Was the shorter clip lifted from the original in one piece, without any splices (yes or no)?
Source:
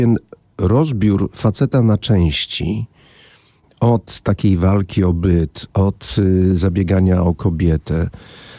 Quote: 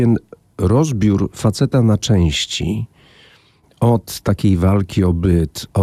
yes